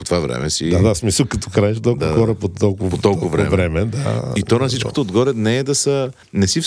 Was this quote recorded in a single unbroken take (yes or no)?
yes